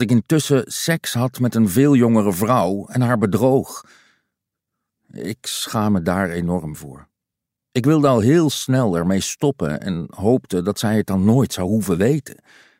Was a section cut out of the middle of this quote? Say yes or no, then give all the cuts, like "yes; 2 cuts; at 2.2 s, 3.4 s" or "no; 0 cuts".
yes; 1 cut; at 7.6 s